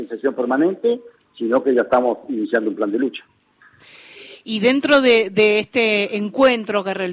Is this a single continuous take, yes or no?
yes